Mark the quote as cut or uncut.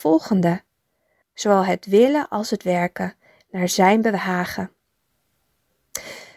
cut